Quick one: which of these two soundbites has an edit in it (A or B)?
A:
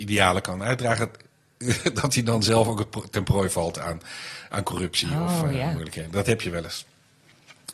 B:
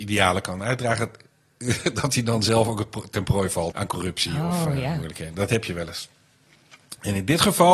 B